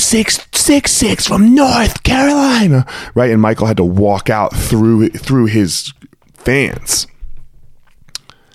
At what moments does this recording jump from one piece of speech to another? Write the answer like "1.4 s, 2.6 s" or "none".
none